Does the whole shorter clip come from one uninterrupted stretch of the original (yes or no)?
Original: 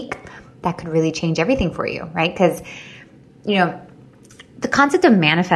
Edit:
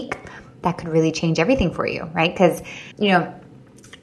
no